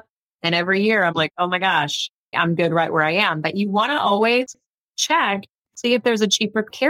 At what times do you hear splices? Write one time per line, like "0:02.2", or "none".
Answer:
0:02.3

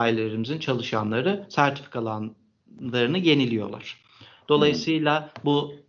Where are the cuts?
none

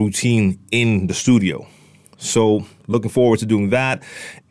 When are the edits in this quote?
none

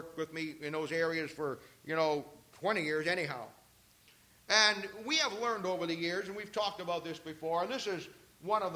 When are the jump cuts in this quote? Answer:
none

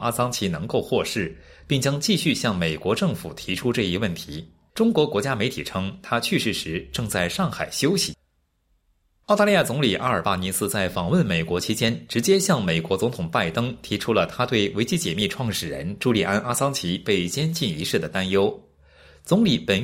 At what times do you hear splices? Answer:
0:04.7

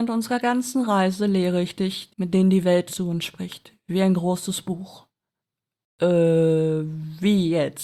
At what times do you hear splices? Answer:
0:02.1

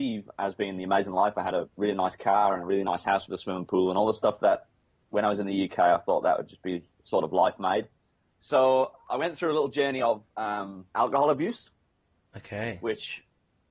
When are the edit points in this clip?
0:08.3
0:10.9

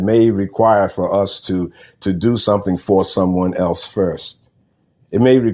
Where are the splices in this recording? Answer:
none

